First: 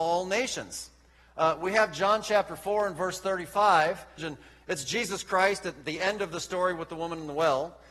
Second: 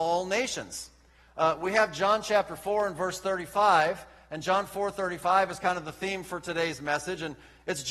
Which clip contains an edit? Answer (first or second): first